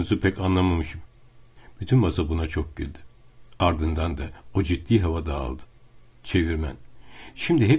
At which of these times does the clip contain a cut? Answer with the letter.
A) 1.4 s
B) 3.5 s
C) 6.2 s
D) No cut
D